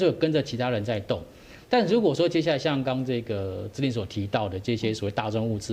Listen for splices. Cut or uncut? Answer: cut